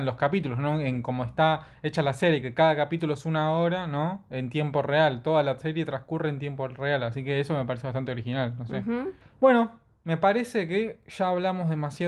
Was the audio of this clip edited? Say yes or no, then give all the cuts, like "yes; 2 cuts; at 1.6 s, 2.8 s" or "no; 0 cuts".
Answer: no; 0 cuts